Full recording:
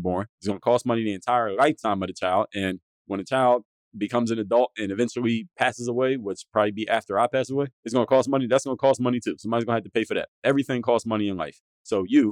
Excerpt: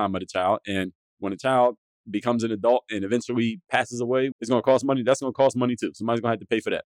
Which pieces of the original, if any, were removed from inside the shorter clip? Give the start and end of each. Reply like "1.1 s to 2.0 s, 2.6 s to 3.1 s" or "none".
6.2 s to 7.8 s